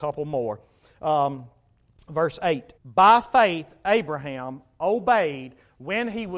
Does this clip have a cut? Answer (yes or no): yes